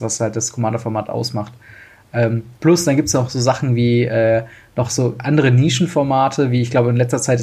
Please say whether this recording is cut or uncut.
uncut